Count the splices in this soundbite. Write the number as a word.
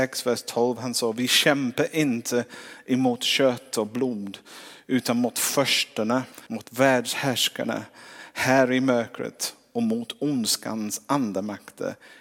one